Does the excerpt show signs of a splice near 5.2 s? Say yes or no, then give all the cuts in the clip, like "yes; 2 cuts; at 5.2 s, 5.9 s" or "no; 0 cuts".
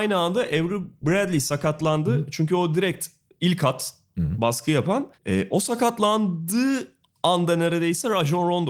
yes; 1 cut; at 5.2 s